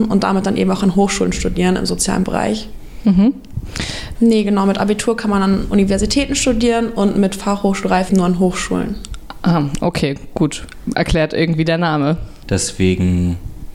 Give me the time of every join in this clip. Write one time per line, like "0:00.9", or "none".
0:04.2
0:08.1
0:12.4